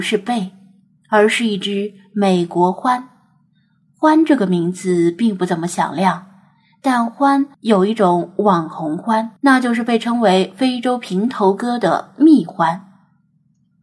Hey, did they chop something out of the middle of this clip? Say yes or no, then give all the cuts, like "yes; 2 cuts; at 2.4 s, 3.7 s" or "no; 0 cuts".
yes; 2 cuts; at 7.5 s, 9.4 s